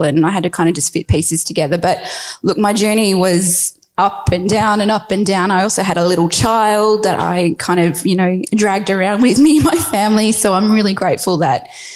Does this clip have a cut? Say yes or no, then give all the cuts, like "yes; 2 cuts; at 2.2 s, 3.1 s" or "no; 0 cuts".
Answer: no; 0 cuts